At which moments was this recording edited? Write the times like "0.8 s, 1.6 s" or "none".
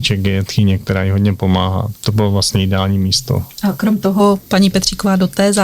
2.0 s